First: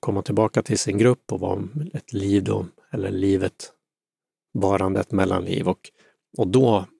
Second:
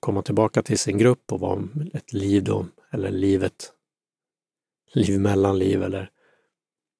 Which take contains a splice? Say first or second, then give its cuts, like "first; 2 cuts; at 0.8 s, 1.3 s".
first; 1 cut; at 4.5 s